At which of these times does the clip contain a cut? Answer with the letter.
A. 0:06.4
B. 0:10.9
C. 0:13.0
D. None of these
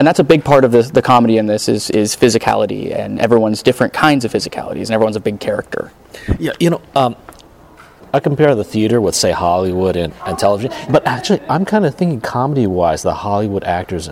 B